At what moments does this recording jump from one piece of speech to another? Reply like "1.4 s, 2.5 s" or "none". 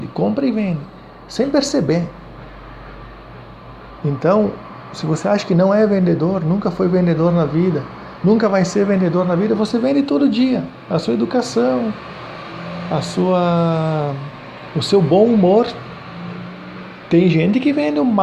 none